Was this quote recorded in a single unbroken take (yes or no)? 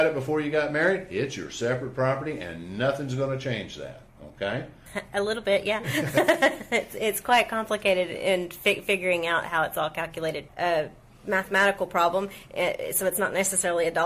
no